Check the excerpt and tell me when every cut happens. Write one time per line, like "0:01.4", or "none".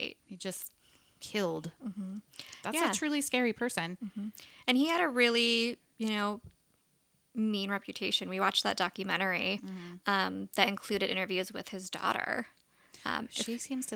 none